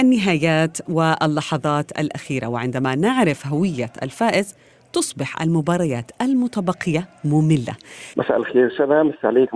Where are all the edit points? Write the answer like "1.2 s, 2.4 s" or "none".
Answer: 8.1 s